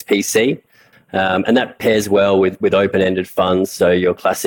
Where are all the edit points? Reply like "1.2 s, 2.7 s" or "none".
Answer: 0.9 s